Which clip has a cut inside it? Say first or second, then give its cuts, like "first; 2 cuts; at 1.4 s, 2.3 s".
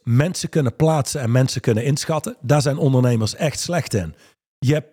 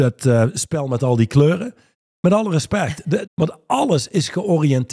second; 1 cut; at 3.3 s